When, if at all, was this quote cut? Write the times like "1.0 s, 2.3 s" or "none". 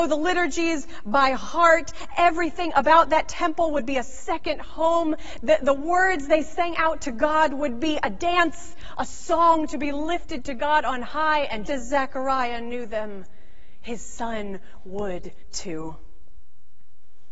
11.7 s